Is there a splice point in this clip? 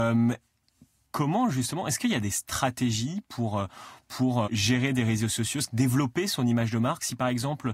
yes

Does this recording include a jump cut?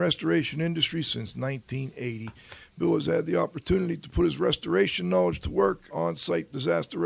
yes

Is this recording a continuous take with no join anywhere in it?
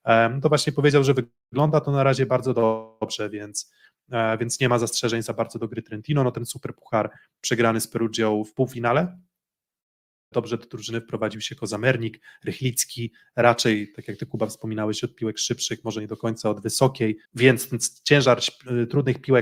no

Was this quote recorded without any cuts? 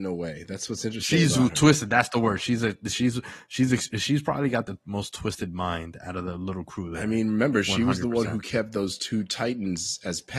yes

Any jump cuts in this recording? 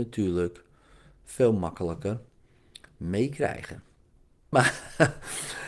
yes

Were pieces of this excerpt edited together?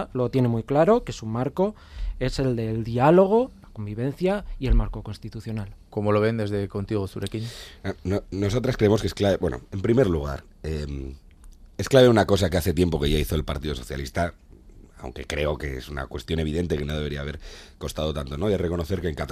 no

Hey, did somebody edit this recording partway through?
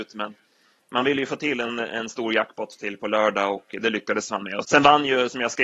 yes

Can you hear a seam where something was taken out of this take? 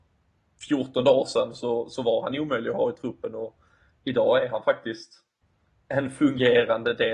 no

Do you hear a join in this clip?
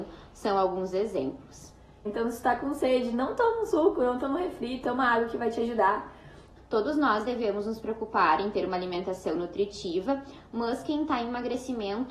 yes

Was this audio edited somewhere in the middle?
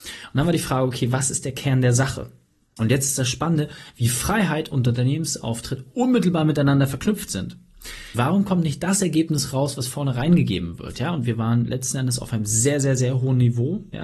yes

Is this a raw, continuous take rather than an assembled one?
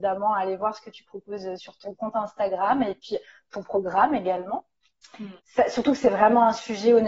no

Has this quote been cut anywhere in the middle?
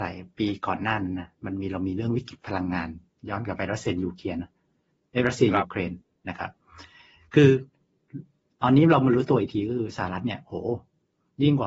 no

